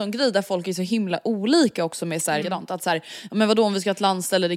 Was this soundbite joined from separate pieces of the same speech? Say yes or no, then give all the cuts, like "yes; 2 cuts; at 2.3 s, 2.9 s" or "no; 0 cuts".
yes; 1 cut; at 2.4 s